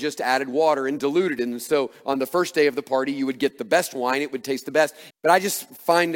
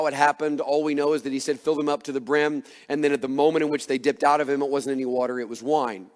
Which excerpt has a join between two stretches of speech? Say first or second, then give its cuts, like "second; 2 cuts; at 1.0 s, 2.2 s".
first; 1 cut; at 5.1 s